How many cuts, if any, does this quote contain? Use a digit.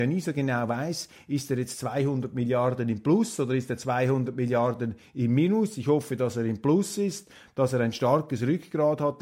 0